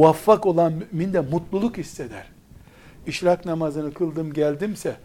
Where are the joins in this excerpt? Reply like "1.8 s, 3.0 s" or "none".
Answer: 3.0 s